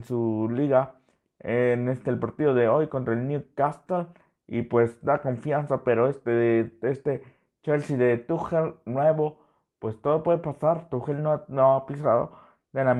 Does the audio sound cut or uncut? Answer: uncut